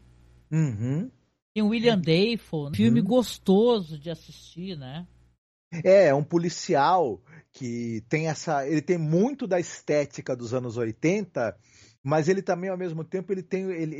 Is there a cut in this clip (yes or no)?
yes